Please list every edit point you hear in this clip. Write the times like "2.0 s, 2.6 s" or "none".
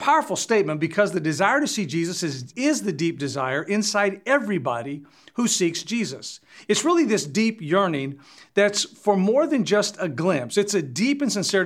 2.5 s